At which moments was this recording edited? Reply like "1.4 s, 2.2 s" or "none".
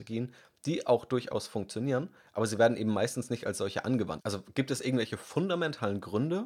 4.2 s